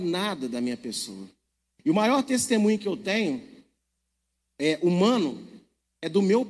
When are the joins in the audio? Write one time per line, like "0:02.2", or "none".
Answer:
none